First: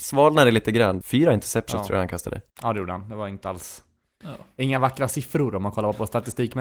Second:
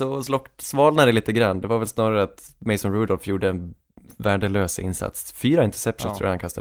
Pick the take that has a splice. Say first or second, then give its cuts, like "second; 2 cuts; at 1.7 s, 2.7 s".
first; 2 cuts; at 1.0 s, 2.5 s